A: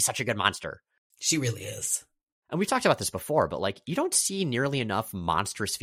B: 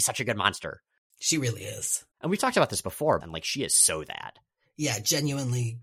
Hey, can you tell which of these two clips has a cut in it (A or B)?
B